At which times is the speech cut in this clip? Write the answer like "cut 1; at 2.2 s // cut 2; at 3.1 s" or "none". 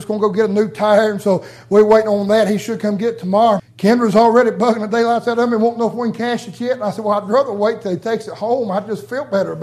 cut 1; at 3.6 s

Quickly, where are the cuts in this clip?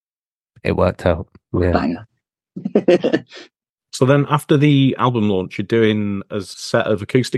none

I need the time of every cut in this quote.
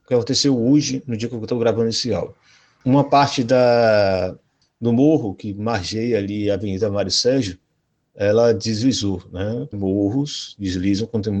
cut 1; at 9.7 s

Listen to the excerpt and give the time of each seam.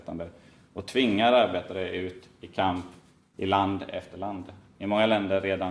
none

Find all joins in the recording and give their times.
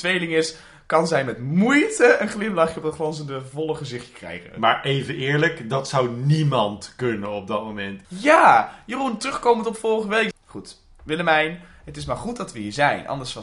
cut 1; at 8.0 s // cut 2; at 10.3 s

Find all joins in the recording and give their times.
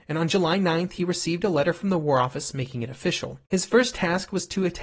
cut 1; at 3.5 s

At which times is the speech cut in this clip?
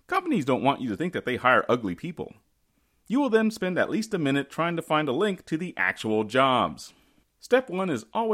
cut 1; at 7.2 s

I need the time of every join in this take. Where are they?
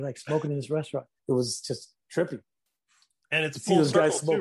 cut 1; at 1.2 s

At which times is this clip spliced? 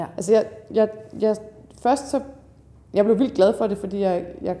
none

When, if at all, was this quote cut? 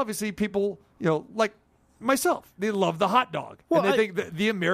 none

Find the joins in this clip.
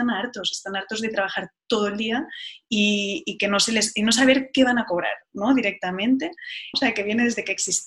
cut 1; at 6.7 s

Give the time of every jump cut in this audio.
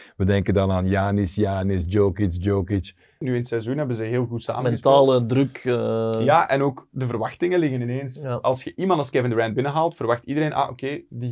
cut 1; at 3.2 s

